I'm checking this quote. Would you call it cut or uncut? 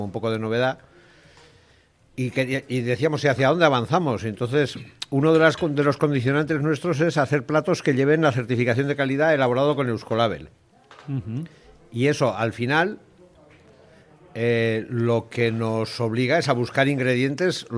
uncut